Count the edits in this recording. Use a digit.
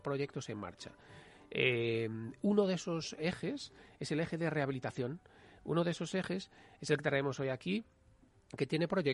0